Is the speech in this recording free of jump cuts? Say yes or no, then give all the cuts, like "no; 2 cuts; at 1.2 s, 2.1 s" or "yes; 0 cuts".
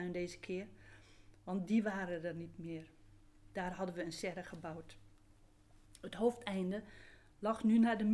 yes; 0 cuts